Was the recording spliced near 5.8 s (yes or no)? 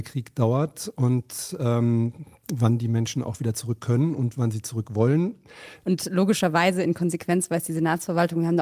yes